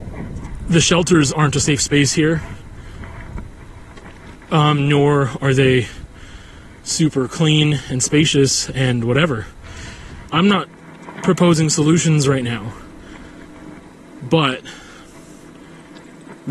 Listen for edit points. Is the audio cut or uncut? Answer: cut